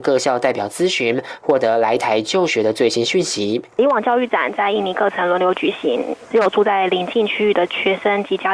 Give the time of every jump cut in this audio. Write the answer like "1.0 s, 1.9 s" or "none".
none